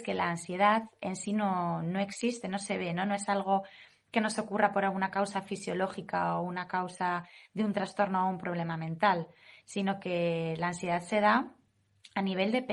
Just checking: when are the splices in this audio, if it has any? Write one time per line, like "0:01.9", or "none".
none